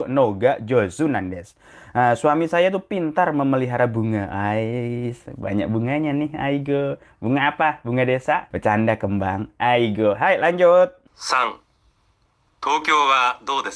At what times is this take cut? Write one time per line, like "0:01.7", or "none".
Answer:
0:08.5
0:11.1

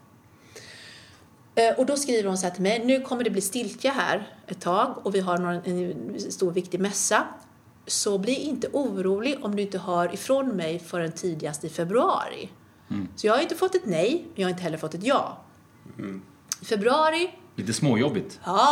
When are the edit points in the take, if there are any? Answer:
none

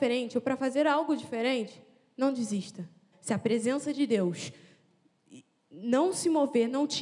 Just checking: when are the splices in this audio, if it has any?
0:03.1

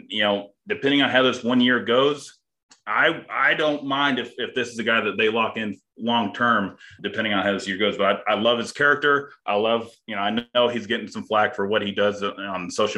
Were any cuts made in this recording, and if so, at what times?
0:07.0

